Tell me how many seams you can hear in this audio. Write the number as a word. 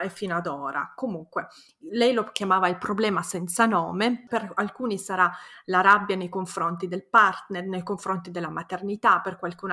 one